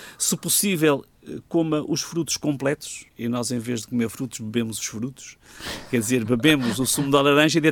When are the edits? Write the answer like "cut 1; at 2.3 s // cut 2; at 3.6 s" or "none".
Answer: cut 1; at 3.1 s